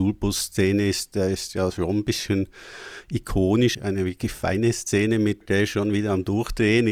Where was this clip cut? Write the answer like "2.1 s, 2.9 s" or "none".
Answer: 3.7 s, 5.4 s